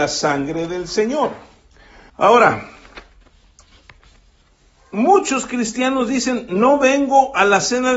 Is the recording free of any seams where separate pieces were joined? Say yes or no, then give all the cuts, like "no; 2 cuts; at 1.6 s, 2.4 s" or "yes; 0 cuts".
no; 1 cut; at 2.1 s